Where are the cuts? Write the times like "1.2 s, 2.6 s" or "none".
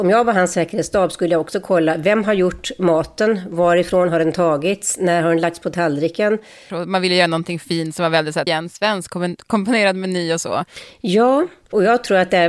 6.7 s, 8.5 s